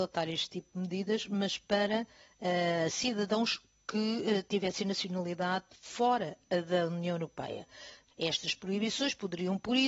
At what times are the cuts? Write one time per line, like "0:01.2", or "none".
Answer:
0:08.1